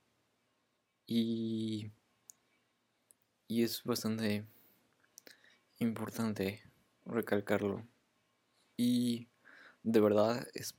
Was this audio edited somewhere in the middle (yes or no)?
yes